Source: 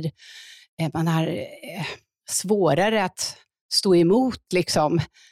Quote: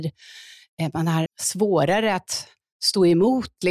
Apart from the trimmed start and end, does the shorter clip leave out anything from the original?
yes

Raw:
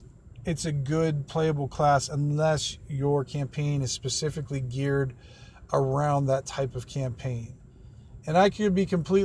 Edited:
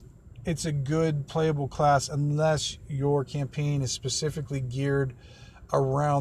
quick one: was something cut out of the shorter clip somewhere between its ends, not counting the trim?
no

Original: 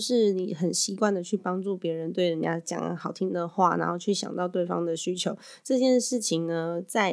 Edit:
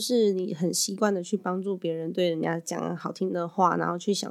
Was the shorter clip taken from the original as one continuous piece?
yes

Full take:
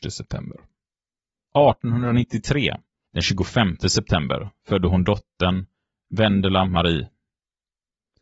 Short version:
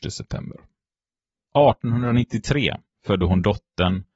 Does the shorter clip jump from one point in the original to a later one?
yes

